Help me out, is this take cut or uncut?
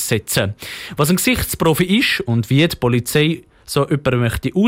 uncut